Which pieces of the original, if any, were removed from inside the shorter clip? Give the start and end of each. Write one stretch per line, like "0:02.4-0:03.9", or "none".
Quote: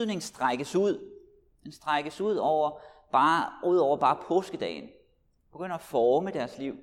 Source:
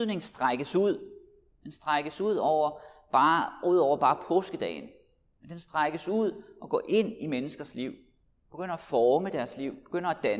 0:05.4-0:08.4